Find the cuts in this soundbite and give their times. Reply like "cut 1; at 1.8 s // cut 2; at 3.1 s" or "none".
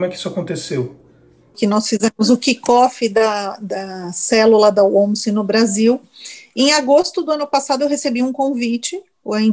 cut 1; at 1.5 s